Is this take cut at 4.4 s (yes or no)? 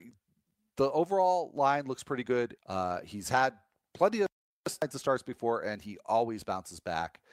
no